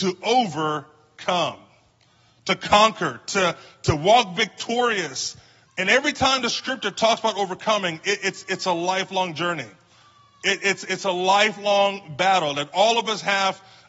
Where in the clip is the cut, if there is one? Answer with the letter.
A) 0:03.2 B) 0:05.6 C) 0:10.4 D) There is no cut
B